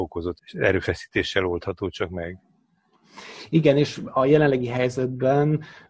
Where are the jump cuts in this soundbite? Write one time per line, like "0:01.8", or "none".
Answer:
none